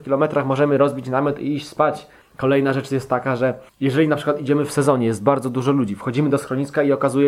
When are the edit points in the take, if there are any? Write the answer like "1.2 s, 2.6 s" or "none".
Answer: 2.2 s, 3.7 s